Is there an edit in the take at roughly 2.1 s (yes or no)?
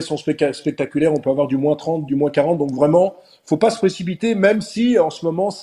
yes